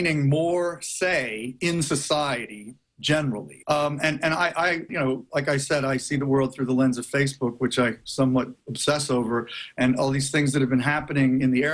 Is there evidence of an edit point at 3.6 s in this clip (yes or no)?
yes